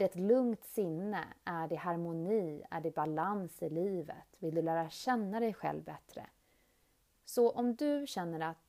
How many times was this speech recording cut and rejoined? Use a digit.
1